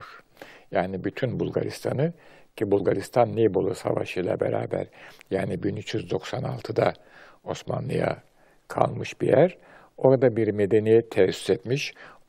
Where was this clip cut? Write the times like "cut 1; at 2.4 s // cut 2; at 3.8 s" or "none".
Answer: none